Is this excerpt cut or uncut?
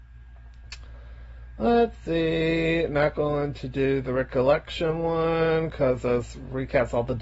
uncut